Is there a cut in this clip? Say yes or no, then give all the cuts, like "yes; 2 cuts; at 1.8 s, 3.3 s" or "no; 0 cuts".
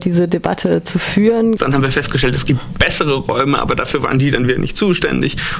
yes; 1 cut; at 1.6 s